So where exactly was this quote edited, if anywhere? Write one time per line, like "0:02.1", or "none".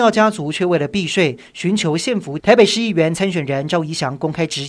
0:02.4